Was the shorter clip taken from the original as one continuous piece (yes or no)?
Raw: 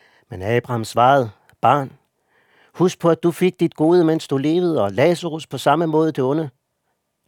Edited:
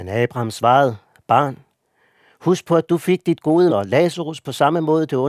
no